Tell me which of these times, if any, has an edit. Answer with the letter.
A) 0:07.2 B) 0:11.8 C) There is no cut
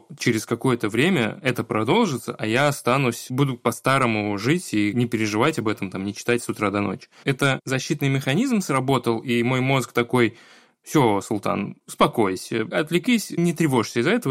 A